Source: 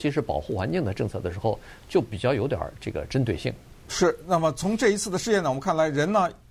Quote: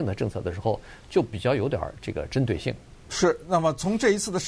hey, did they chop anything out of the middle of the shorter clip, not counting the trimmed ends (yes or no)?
no